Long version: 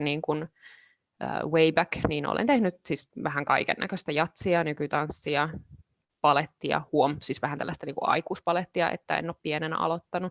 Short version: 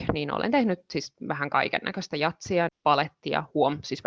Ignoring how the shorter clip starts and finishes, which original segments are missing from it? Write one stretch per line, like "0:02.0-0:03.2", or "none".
0:04.6-0:06.1